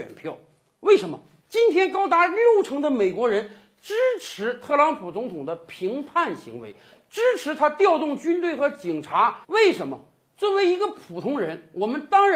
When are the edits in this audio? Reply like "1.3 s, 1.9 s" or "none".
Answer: 1.4 s, 9.4 s